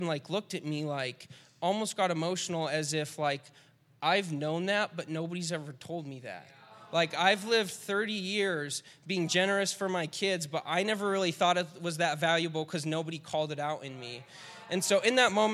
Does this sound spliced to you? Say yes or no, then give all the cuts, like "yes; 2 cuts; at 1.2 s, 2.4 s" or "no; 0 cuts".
no; 0 cuts